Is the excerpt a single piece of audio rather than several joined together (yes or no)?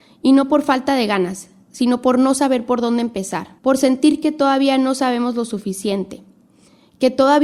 no